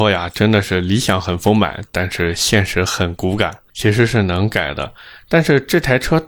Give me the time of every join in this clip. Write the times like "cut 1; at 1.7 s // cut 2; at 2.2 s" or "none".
cut 1; at 3.7 s

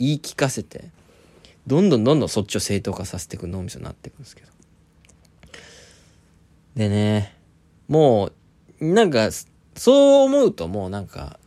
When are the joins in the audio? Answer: none

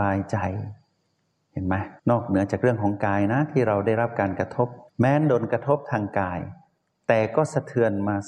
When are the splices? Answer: cut 1; at 2.0 s // cut 2; at 4.9 s

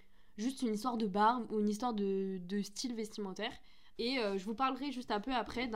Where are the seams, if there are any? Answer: cut 1; at 4.0 s

